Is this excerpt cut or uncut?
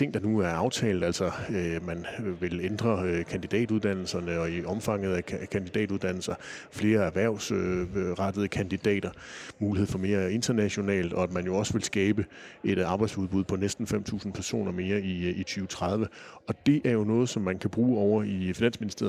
cut